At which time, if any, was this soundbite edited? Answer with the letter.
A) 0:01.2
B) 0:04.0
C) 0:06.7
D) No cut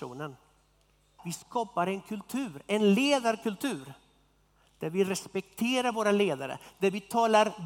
A